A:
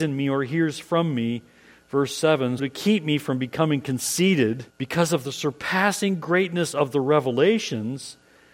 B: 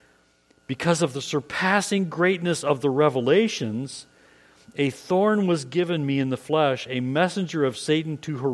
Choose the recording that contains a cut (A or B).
A